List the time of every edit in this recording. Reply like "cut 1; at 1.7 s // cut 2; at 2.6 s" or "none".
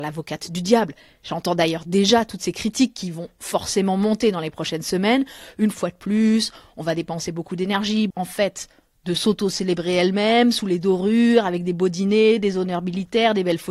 cut 1; at 8.1 s